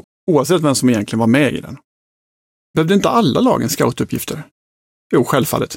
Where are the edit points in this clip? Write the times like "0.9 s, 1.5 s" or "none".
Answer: 2.6 s